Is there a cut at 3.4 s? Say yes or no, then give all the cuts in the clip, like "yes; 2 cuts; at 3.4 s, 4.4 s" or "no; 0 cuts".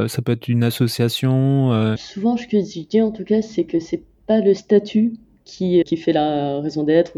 no; 2 cuts; at 2.0 s, 5.8 s